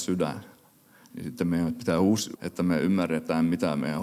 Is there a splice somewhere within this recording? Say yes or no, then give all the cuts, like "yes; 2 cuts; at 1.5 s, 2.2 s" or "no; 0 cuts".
yes; 1 cut; at 2.3 s